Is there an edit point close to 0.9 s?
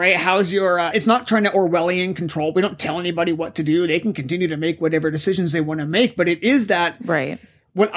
yes; 1 cut; at 0.9 s

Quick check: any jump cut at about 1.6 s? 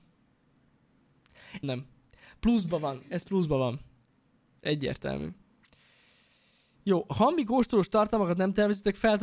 yes; 1 cut; at 1.6 s

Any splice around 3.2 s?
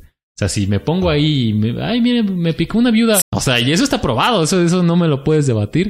yes; 1 cut; at 3.2 s

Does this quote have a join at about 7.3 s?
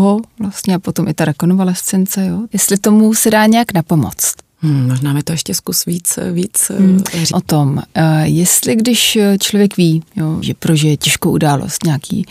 yes; 3 cuts; at 2.5 s, 7.3 s, 10.4 s

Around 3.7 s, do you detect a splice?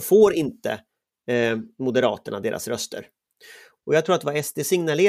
yes; 1 cut; at 3.7 s

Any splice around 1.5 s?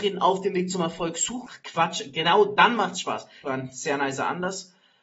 yes; 2 cuts; at 1.5 s, 3.4 s

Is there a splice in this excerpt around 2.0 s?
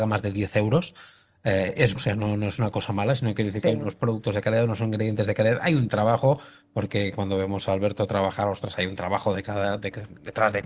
yes; 1 cut; at 2.0 s

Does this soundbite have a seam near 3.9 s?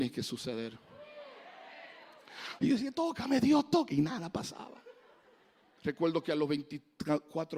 no; 2 cuts; at 2.6 s, 5.8 s

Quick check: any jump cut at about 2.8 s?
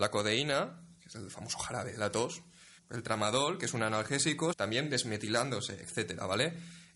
yes; 2 cuts; at 2.8 s, 4.5 s

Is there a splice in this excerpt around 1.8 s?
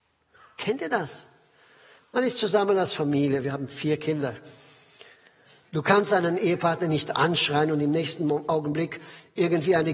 no; 1 cut; at 5.6 s

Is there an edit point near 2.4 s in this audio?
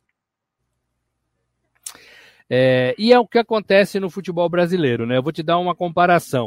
yes; 1 cut; at 2.4 s

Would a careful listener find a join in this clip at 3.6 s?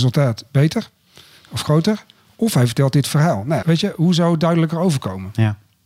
yes; 1 cut; at 3.6 s

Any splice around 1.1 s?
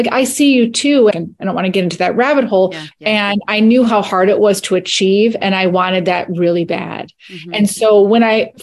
yes; 2 cuts; at 1.1 s, 2.9 s

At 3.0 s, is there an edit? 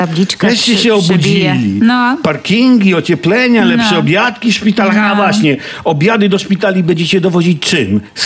no; 0 cuts

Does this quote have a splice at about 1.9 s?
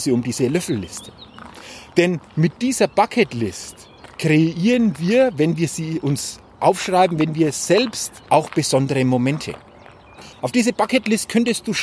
no; 2 cuts; at 8.3 s, 10.3 s

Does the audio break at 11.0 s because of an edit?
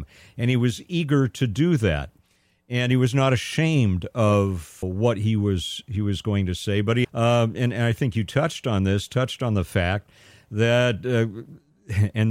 no; 2 cuts; at 4.8 s, 7.0 s

